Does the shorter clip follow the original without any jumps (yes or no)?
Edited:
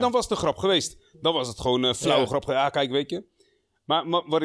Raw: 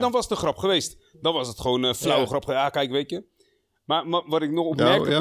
yes